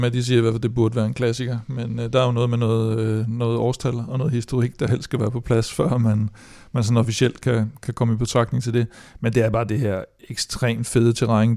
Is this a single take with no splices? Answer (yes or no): yes